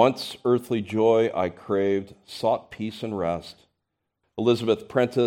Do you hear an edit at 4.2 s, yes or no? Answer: yes